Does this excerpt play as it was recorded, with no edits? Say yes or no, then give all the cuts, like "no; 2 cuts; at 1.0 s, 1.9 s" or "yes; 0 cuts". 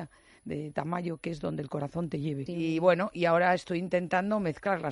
no; 1 cut; at 2.5 s